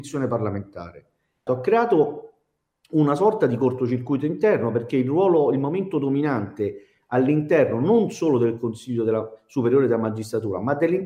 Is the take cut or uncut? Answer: cut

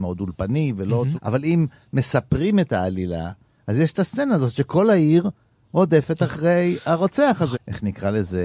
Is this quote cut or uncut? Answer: cut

